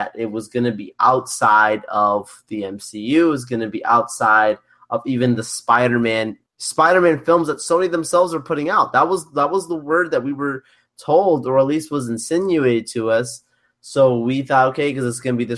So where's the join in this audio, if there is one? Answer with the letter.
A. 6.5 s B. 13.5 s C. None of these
A